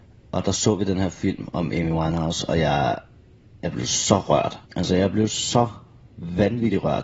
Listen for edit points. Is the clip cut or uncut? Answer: cut